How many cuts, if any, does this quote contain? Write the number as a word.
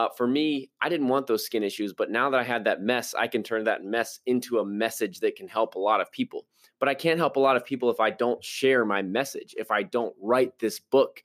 zero